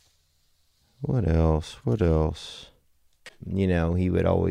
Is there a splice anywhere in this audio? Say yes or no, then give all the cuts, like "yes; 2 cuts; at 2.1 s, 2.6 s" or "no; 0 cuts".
yes; 1 cut; at 3.3 s